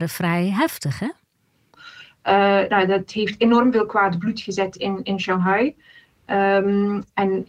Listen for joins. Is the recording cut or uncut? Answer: cut